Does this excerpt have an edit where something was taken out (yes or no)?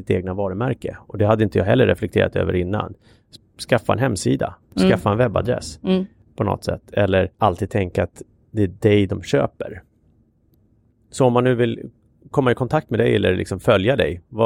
yes